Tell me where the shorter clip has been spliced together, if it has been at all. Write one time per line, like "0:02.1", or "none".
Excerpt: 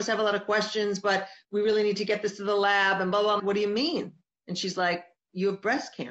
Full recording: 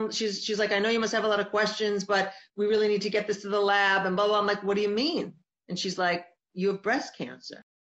0:03.4